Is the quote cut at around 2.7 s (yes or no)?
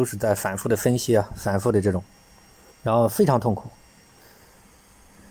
yes